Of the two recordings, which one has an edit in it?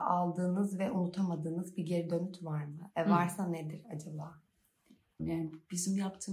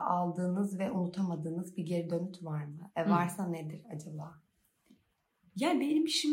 first; 1 cut; at 5.2 s

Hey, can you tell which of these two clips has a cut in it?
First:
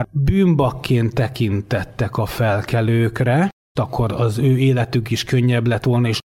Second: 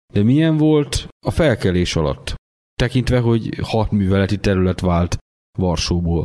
first; 1 cut; at 3.8 s

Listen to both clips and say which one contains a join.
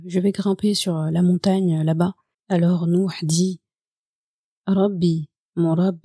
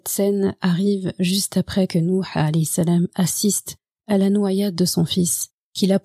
first; 1 cut; at 2.3 s

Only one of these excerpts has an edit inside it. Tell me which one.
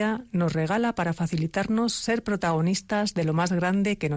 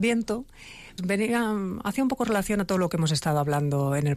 second; 1 cut; at 1.0 s

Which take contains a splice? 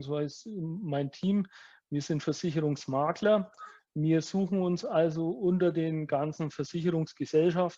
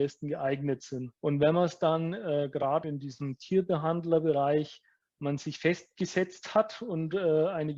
second; 2 cuts; at 1.2 s, 2.8 s

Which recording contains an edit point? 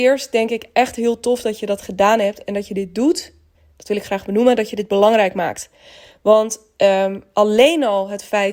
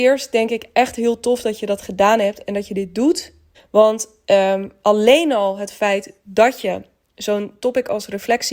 second; 1 cut; at 3.5 s

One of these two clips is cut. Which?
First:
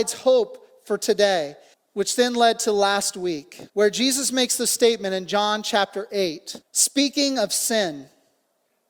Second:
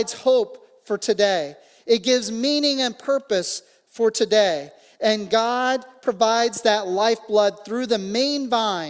first; 3 cuts; at 1.7 s, 3.7 s, 6.6 s

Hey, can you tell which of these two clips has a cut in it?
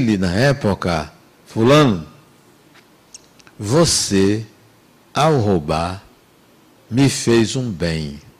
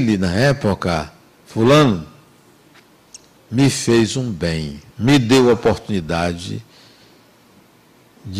second; 2 cuts; at 3.4 s, 4.9 s

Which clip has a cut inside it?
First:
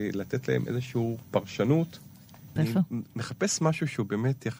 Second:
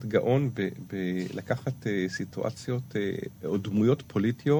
first; 1 cut; at 2.6 s

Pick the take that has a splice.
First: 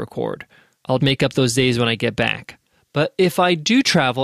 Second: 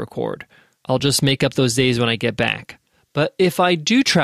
first; 1 cut; at 1.0 s

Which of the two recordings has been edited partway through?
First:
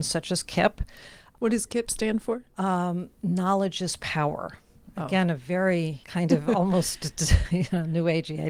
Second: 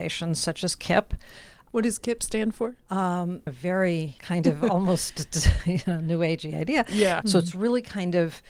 second; 2 cuts; at 3.5 s, 7.2 s

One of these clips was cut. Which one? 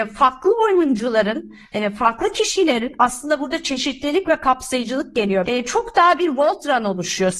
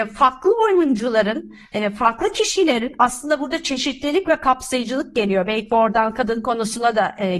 first; 1 cut; at 5.5 s

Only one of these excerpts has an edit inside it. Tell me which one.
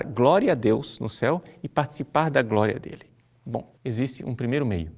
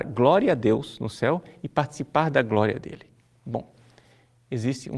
first; 1 cut; at 3.8 s

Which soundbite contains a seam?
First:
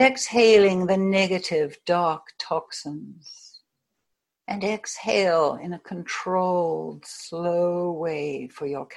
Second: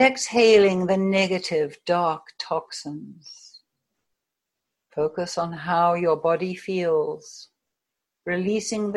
first; 1 cut; at 4.4 s

